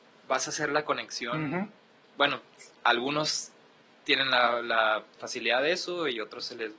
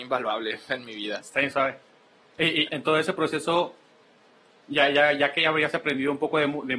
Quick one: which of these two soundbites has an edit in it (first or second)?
second